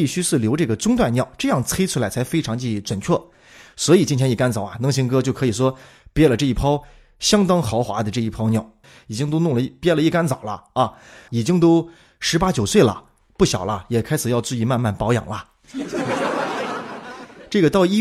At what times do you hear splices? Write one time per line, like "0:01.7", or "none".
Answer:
0:08.8
0:11.3